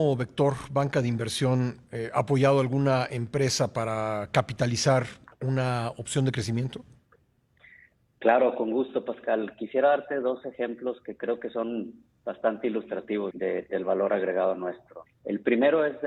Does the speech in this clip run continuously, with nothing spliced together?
no; 2 cuts; at 13.3 s, 15.1 s

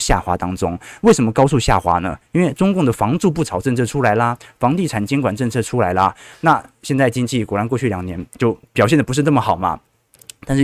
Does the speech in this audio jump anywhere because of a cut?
no; 0 cuts

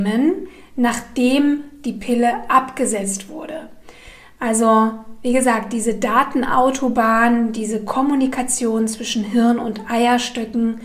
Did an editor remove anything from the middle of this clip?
no; 0 cuts

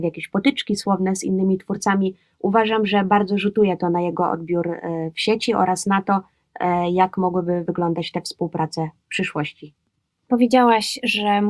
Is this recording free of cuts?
yes; 0 cuts

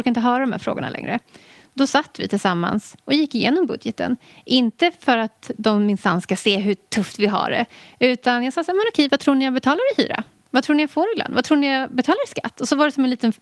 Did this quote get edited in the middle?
no; 0 cuts

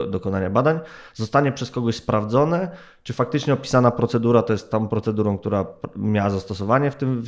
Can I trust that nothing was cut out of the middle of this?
yes; 0 cuts

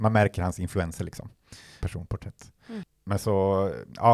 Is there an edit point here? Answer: yes; 1 cut; at 1.8 s

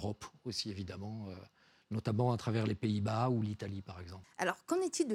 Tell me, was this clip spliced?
yes; 1 cut; at 4.2 s

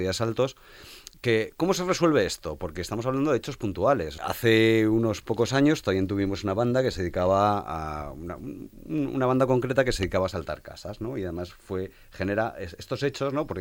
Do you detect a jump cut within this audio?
yes; 1 cut; at 4.2 s

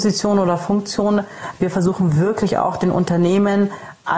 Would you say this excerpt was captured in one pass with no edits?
yes; 0 cuts

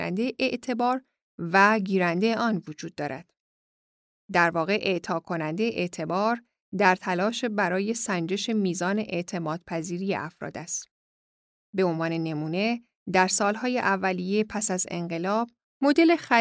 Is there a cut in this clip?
no; 0 cuts

